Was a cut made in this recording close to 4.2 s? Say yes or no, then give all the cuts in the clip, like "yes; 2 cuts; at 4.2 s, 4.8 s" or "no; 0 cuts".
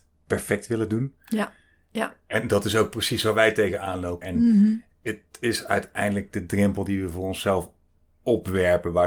yes; 1 cut; at 4.2 s